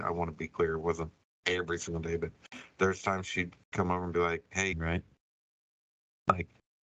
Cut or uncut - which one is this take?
cut